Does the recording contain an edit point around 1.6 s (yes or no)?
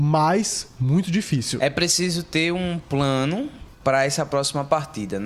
no